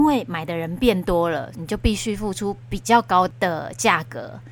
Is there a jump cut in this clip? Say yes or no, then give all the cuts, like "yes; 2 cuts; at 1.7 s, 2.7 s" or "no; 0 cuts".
yes; 1 cut; at 1.5 s